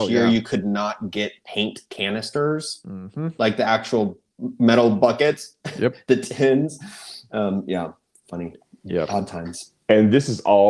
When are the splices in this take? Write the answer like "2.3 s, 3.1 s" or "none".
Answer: 9.8 s